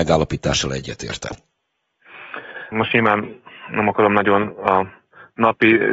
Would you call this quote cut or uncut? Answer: cut